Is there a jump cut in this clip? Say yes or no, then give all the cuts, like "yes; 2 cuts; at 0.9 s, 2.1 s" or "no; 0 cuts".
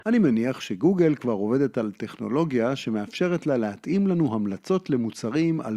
no; 0 cuts